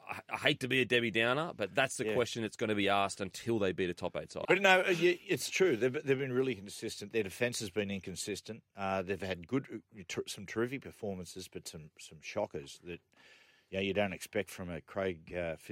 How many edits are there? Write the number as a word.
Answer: one